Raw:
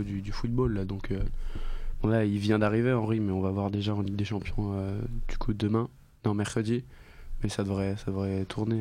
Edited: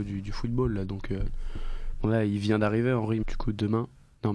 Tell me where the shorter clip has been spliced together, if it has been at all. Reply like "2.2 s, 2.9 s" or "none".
3.2 s